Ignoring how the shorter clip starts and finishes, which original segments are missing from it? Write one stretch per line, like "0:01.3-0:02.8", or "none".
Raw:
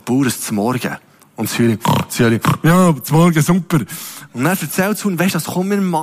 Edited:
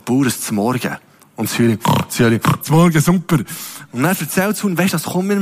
0:02.6-0:03.0

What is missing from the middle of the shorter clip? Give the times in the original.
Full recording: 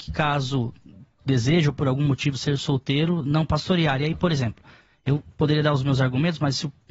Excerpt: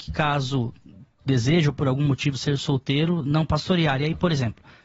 none

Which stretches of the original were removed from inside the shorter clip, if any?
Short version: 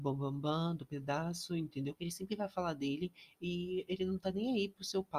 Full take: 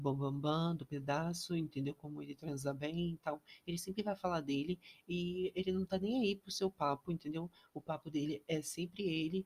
0:01.9-0:03.6

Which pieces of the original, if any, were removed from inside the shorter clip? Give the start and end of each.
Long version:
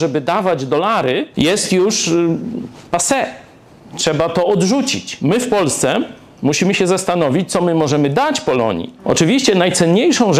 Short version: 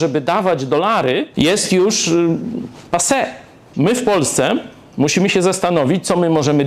0:03.7-0:05.2

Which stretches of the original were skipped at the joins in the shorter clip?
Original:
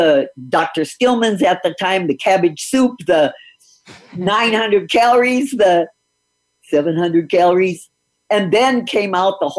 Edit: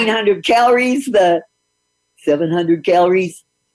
none

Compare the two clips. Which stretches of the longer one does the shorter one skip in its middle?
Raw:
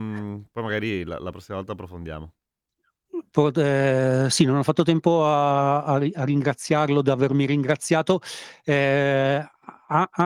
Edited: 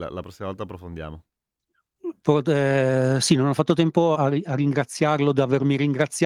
0:05.2-0:05.8

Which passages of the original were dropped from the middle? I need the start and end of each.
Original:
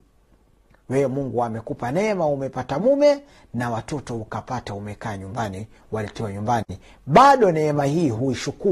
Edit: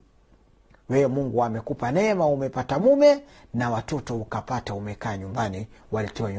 none

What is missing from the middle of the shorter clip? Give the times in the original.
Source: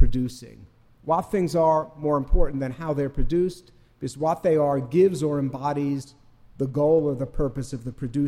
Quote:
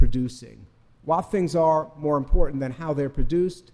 none

